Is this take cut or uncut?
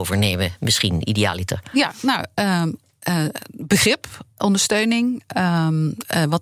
uncut